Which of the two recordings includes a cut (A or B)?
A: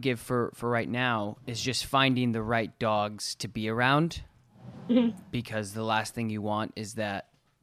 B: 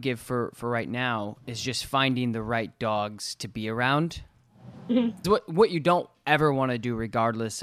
B